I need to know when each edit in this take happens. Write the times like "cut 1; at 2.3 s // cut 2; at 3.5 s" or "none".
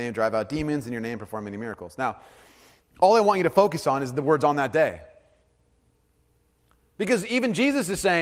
none

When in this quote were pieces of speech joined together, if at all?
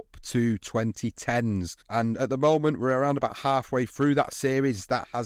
cut 1; at 1.8 s

